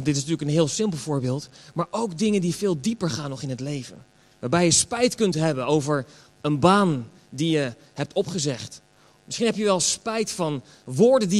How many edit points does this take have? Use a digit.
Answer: 1